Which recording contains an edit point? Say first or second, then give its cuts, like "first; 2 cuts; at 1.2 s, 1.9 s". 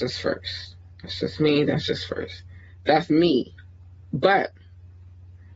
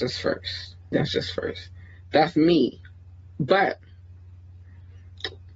second; 1 cut; at 0.9 s